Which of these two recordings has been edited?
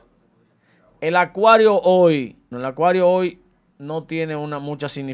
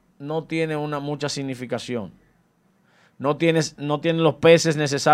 first; 1 cut; at 2.5 s

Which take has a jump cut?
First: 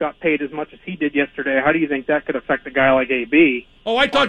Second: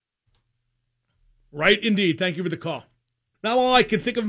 second; 1 cut; at 3.3 s

